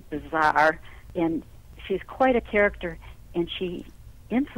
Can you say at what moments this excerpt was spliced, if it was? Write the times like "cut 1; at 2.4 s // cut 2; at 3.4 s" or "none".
none